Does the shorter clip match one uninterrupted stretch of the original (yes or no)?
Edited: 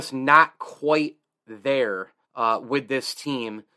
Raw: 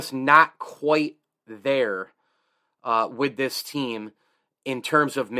no